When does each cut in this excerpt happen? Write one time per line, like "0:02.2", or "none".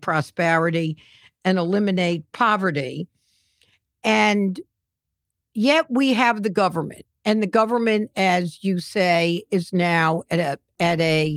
none